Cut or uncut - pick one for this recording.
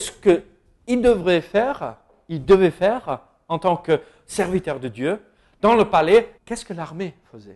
cut